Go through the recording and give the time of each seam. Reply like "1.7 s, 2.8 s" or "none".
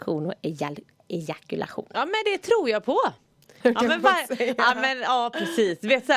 1.9 s, 3.6 s